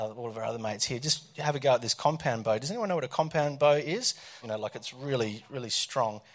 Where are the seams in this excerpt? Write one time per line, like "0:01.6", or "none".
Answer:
0:04.4